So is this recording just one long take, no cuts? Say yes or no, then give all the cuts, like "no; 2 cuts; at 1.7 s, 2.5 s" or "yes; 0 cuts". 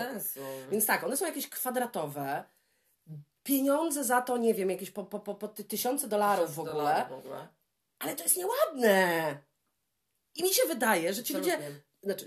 yes; 0 cuts